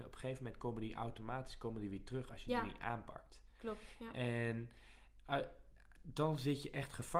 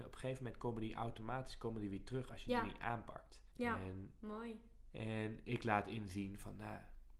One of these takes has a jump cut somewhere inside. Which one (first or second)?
second